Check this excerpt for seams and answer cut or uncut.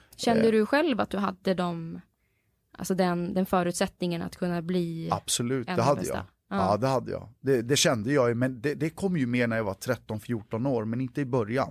uncut